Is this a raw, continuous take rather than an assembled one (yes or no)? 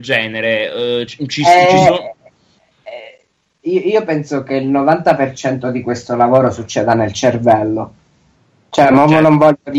yes